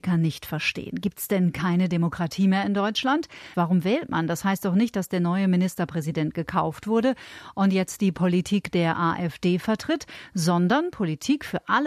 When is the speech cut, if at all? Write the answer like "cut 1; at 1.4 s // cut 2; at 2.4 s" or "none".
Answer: cut 1; at 3.5 s